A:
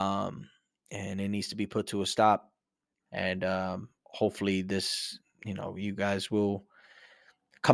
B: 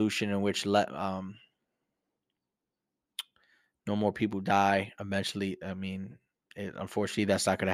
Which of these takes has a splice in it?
A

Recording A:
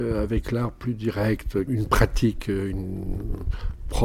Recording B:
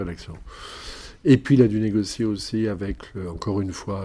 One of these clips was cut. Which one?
A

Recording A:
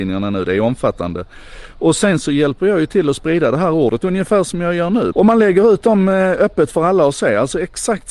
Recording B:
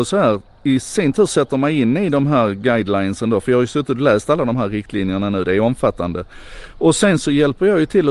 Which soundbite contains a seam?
A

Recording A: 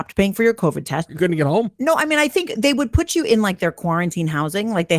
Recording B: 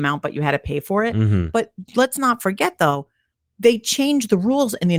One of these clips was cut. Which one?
A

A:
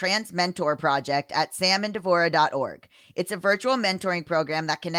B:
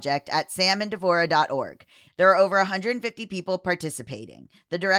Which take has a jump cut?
B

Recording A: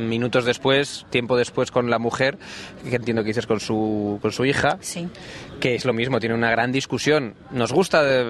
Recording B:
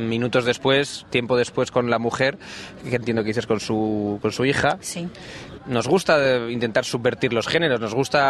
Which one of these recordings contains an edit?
B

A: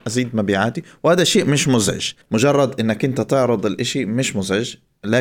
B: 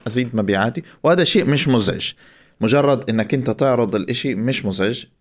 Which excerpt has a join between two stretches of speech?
A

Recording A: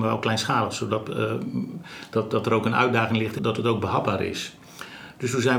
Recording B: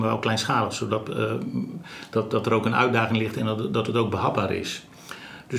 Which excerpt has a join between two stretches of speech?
A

